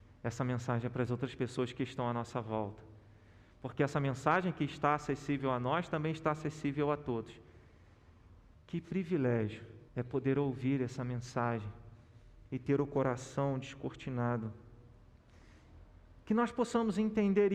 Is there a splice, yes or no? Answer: yes